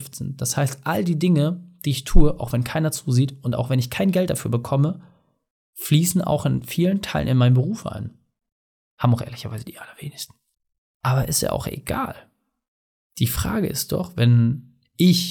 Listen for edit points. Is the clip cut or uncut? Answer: cut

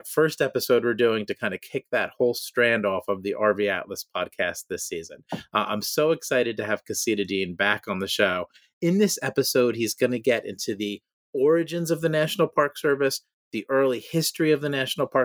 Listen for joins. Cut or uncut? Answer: uncut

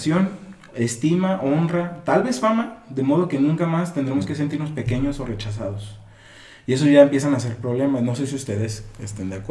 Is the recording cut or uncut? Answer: uncut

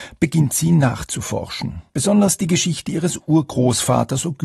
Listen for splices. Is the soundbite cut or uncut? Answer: cut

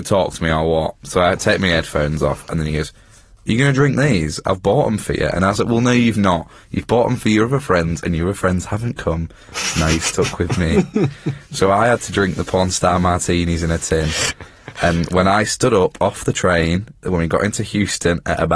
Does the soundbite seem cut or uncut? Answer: uncut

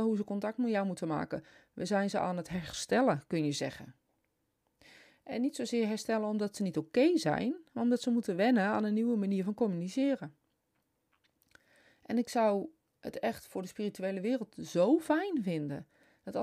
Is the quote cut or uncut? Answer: uncut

